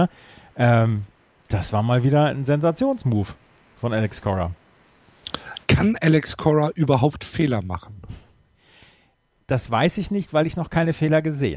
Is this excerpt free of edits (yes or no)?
yes